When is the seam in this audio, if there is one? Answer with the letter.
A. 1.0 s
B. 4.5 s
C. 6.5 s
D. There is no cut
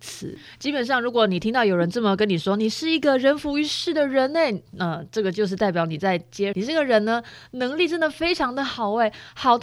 C